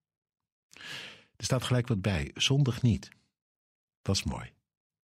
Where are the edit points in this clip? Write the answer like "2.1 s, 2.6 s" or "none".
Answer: none